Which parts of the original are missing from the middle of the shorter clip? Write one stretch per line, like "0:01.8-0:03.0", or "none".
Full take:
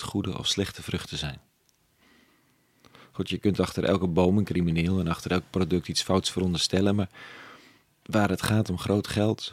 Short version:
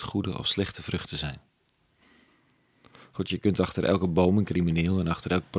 none